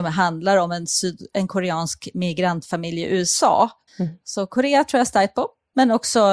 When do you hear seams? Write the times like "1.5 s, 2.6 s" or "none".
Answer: 3.9 s